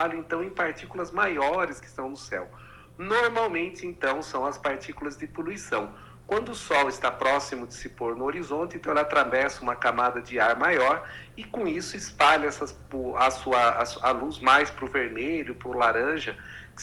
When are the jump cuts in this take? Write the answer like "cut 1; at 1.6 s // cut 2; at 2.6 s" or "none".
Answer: none